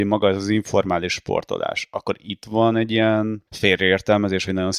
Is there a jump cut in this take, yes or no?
yes